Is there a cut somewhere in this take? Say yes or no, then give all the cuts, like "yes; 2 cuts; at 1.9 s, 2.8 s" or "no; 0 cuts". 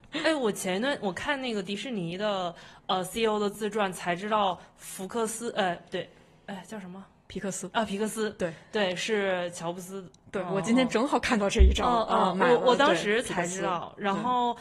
no; 0 cuts